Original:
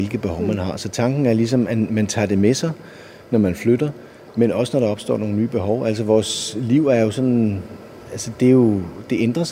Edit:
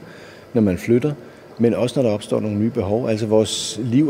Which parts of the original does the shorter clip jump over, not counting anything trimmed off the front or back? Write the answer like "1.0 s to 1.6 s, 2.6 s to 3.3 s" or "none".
none